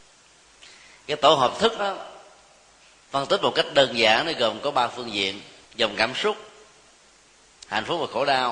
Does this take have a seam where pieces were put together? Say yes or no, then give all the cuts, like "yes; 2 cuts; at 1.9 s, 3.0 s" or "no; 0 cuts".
yes; 2 cuts; at 1.8 s, 5.6 s